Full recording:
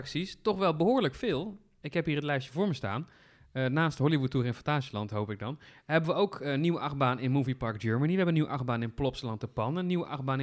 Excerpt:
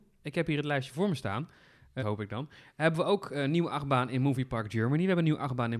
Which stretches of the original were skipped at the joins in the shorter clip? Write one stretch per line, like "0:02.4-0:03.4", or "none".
0:03.6-0:05.1